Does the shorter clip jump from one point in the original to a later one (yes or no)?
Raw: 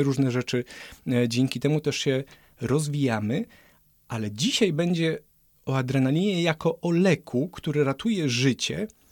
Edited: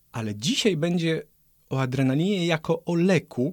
no